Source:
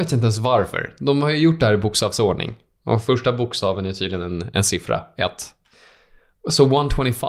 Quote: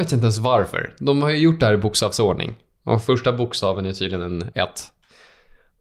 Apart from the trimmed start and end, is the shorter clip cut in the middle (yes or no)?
yes